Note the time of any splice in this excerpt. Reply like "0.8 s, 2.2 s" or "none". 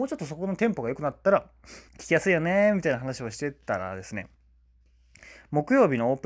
1.9 s